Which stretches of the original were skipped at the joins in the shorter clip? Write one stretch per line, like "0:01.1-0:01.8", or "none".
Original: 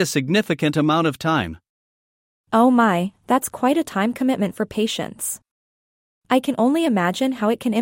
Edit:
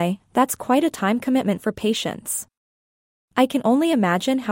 none